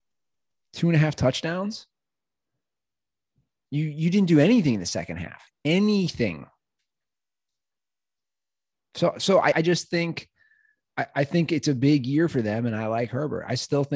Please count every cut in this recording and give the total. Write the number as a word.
one